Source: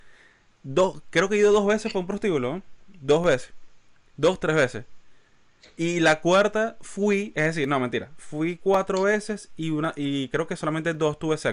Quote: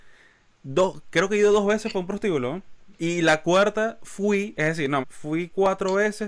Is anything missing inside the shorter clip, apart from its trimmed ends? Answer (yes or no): yes